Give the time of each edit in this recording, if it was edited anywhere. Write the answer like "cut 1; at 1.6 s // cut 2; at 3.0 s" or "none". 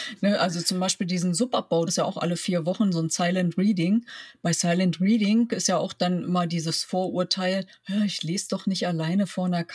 cut 1; at 1.9 s